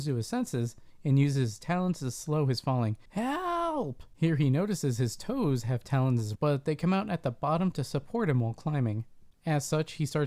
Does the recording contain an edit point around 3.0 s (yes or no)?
no